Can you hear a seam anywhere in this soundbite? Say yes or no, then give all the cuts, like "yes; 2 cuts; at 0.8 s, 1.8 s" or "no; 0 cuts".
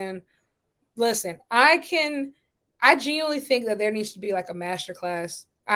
no; 0 cuts